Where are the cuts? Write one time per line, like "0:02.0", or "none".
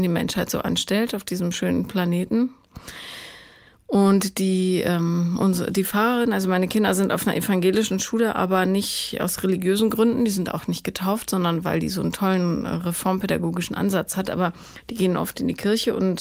none